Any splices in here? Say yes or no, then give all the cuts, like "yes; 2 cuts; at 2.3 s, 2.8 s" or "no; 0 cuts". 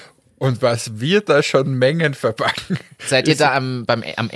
no; 0 cuts